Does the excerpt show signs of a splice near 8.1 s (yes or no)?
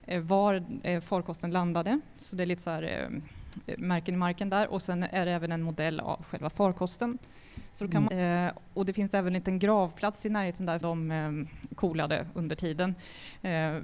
yes